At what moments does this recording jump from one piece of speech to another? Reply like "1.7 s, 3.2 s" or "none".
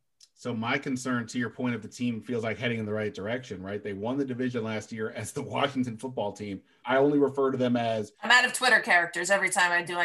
6.8 s

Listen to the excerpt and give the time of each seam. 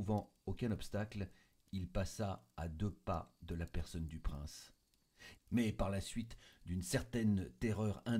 5.3 s

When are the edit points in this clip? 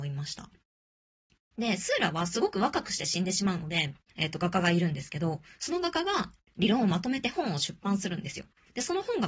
1.4 s, 4.1 s

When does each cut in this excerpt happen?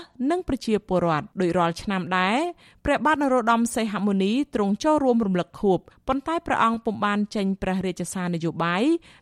1.3 s

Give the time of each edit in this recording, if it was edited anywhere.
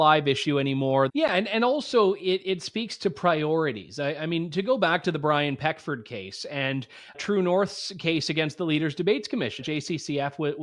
1.1 s, 7.1 s, 9.6 s

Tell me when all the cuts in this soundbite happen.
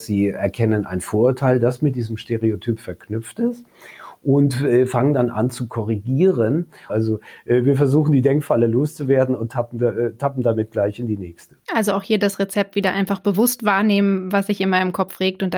6.9 s, 11.6 s, 14.3 s

